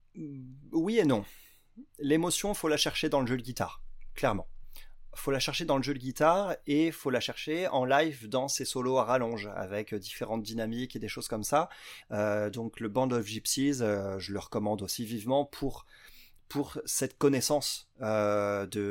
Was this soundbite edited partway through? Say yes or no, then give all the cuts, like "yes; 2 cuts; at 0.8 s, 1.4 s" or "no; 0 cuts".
yes; 1 cut; at 12.0 s